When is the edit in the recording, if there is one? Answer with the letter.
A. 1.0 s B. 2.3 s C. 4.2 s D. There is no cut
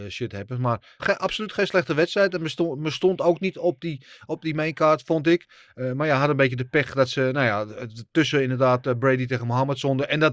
A